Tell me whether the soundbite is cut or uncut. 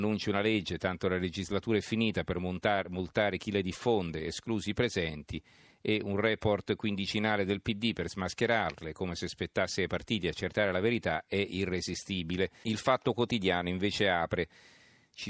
cut